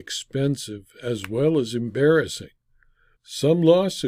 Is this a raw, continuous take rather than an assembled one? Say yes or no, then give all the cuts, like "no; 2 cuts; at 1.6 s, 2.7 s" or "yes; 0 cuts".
no; 1 cut; at 3.2 s